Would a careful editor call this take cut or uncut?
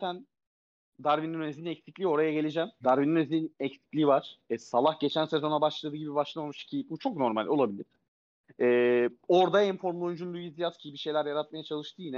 cut